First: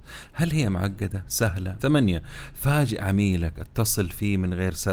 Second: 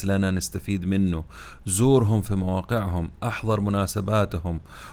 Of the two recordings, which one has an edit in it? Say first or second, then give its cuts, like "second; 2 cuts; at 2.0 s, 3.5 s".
first; 1 cut; at 1.8 s